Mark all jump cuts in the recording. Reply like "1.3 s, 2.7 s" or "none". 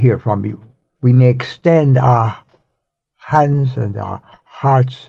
0.9 s